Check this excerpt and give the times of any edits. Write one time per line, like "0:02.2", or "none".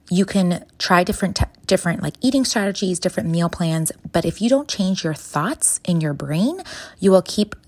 none